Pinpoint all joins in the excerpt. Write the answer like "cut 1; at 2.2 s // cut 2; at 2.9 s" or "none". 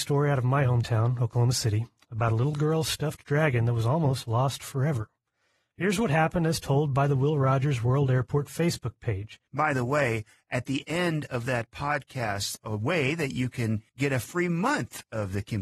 cut 1; at 9.5 s // cut 2; at 12.6 s // cut 3; at 13.9 s